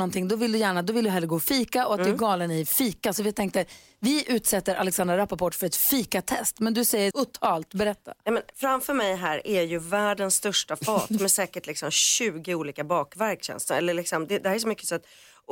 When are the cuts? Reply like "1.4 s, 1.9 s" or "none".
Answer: 7.1 s